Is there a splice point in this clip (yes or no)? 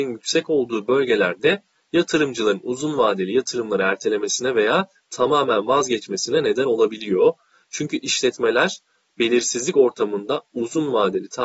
no